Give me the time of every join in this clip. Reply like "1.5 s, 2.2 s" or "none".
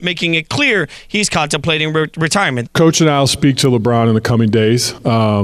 2.7 s